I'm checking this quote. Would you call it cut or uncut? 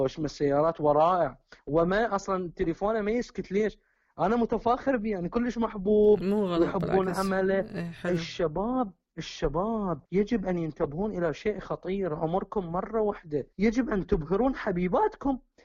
cut